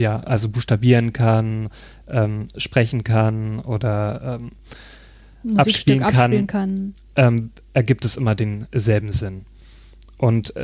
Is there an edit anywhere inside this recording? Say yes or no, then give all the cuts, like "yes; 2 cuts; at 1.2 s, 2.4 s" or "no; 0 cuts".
no; 0 cuts